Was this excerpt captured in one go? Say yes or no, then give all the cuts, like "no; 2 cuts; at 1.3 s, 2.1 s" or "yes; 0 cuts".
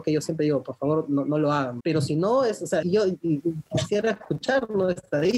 no; 2 cuts; at 1.8 s, 2.8 s